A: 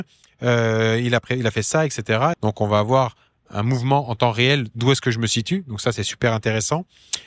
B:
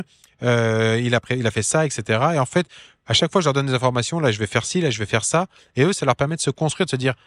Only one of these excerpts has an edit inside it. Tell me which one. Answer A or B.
A